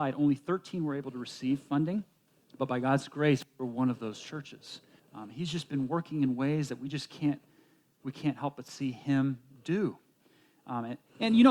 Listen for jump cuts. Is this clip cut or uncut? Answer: cut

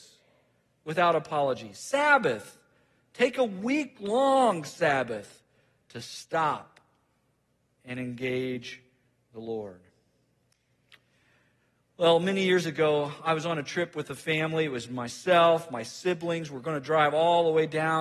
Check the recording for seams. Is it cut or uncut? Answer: uncut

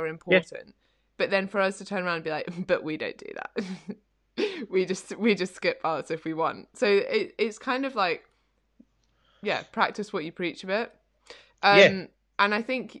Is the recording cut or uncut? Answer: uncut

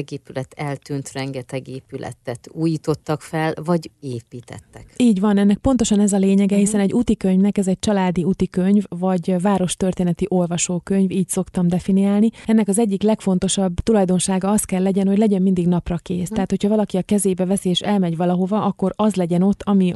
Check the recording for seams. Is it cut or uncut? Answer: uncut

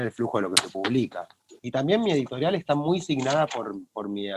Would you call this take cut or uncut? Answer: cut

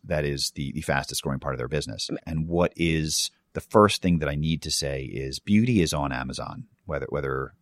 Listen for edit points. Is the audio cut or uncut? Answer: cut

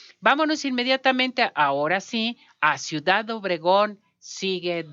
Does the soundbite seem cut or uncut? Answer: uncut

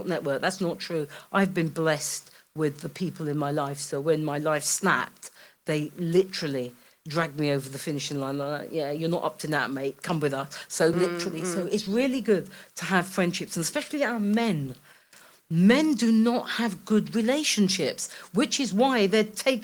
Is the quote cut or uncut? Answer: uncut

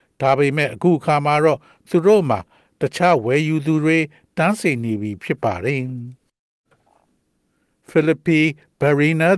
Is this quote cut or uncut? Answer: uncut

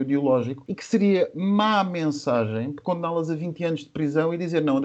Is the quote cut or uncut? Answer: uncut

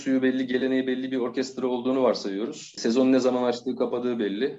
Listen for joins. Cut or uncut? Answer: uncut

